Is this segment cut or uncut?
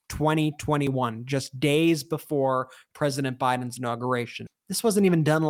cut